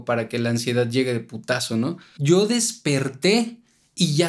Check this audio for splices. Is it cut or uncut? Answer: cut